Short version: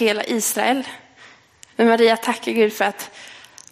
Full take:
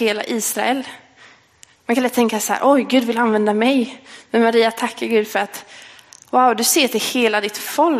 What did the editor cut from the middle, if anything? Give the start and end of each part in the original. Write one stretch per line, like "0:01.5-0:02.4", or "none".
0:01.7-0:04.3